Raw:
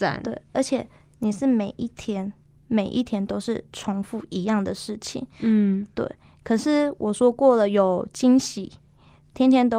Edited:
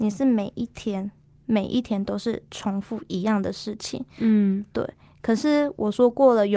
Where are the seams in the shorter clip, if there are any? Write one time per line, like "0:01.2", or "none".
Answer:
none